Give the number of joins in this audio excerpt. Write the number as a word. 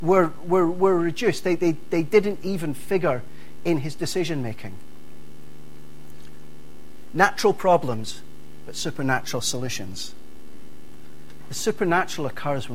zero